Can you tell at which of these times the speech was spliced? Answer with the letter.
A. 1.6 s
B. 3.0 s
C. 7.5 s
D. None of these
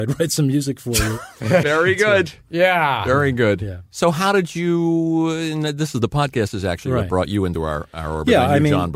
A